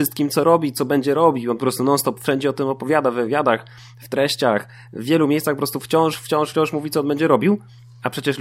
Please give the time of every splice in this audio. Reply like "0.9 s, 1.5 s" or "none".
none